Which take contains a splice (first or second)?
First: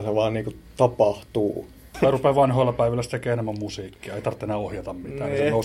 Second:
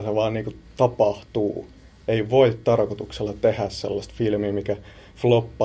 first